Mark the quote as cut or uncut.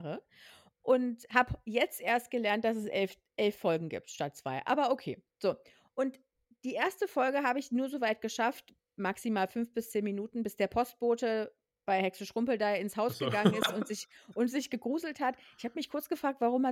uncut